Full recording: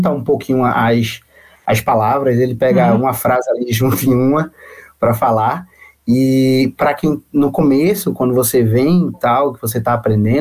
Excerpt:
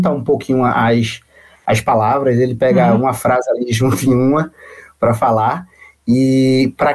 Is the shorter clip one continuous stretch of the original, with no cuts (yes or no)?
yes